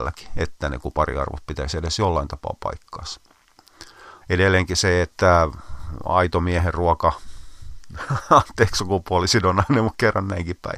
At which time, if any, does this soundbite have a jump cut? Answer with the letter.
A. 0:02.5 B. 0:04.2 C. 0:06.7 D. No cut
B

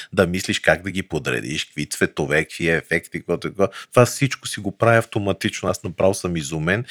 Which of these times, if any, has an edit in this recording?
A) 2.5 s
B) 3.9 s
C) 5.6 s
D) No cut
D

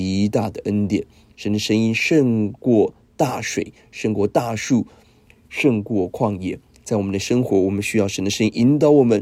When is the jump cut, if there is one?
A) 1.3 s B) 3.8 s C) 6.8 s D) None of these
A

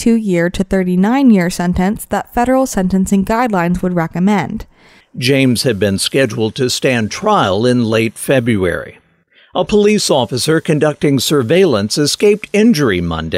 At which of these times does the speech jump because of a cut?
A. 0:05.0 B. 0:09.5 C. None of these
A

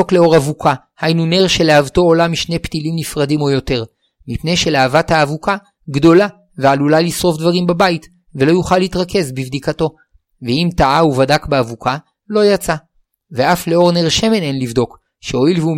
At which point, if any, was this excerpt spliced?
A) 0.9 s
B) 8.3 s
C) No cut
B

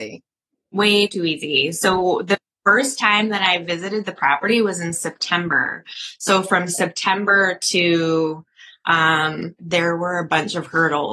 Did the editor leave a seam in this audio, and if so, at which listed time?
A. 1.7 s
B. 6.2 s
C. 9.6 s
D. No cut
C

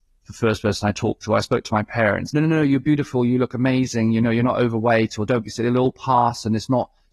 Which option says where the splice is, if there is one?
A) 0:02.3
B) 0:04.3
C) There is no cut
A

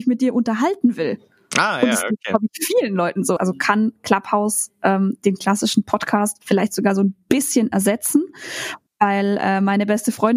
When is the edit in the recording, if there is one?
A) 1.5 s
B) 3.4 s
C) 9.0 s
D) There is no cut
B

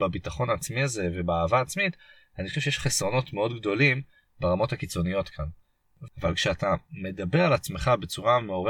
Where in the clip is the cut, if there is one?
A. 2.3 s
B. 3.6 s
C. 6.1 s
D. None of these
C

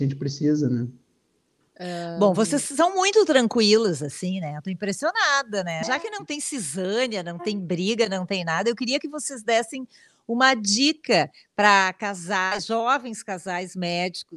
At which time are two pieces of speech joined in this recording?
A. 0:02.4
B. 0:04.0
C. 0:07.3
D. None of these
D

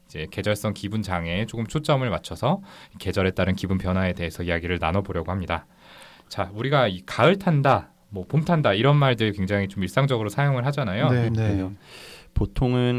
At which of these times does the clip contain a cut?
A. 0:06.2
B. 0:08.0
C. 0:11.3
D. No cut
C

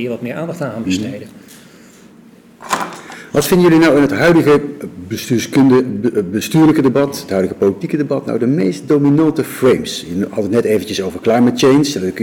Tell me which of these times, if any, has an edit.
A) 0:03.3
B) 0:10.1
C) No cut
C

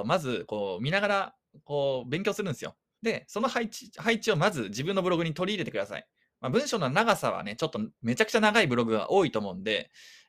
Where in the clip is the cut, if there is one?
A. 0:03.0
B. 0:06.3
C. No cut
A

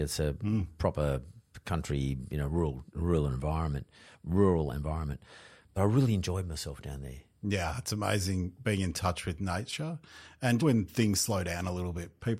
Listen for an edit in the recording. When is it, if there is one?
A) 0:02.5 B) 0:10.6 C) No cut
B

